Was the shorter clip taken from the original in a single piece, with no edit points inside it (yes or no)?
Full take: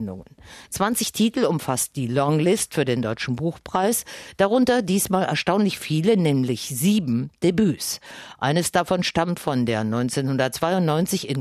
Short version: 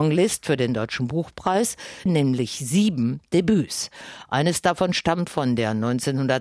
no